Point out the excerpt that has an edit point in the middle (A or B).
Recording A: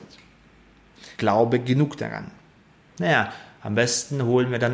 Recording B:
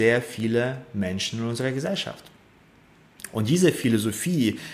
A